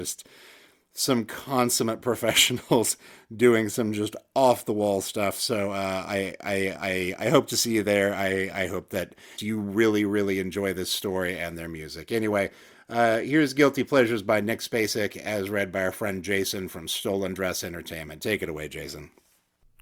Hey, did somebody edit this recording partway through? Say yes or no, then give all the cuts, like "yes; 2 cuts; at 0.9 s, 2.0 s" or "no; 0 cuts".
yes; 1 cut; at 9.4 s